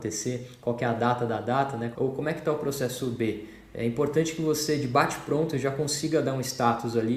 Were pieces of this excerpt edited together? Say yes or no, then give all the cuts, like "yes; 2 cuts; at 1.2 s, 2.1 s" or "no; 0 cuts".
yes; 1 cut; at 1.9 s